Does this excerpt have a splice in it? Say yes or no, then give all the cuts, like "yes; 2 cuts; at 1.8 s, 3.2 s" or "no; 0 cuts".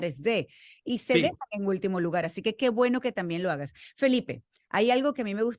no; 0 cuts